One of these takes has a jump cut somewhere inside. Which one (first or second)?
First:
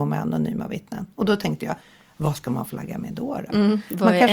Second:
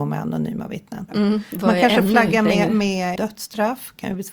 second